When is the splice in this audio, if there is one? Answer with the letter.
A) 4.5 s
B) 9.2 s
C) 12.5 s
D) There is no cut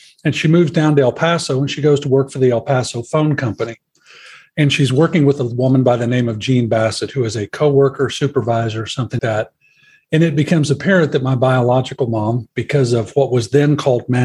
B